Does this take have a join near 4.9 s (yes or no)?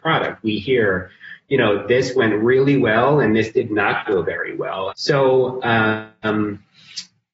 yes